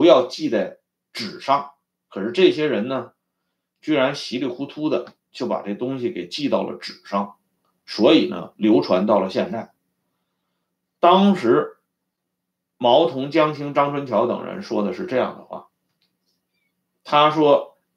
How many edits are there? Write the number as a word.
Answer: zero